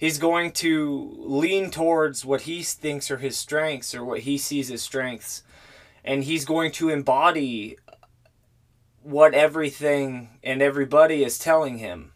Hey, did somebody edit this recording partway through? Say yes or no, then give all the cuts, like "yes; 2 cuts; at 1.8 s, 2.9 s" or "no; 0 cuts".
no; 0 cuts